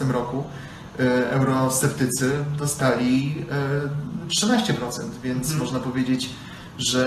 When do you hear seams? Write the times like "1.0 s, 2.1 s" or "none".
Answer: none